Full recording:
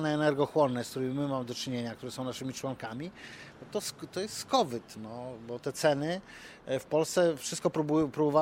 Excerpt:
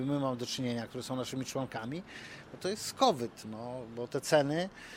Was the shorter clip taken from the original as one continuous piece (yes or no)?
no